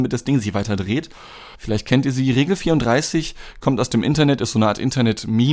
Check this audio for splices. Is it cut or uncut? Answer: cut